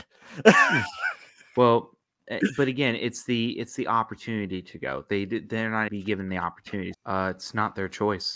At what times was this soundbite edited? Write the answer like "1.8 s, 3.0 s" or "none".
5.9 s, 6.9 s